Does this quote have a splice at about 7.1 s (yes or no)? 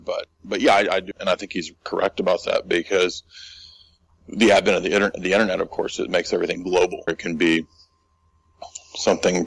yes